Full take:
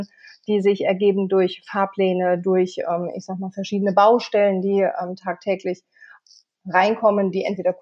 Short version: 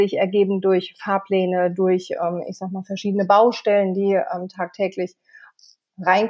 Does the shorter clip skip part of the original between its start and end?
no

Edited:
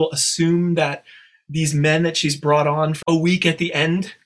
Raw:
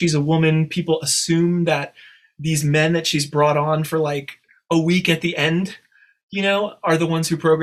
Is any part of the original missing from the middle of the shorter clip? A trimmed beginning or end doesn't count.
yes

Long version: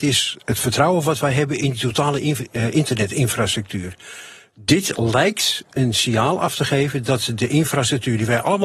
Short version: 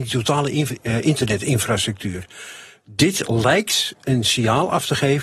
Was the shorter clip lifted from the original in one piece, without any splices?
yes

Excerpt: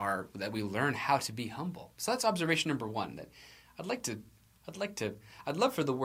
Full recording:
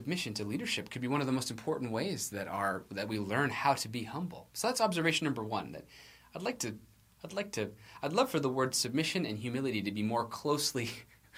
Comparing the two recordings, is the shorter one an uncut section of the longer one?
yes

